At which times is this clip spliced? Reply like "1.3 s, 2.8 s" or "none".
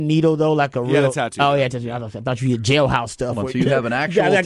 none